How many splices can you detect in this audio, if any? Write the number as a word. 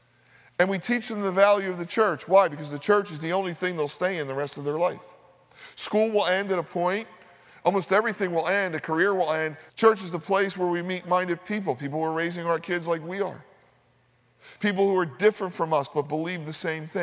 three